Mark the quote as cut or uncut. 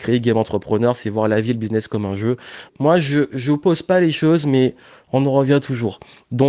cut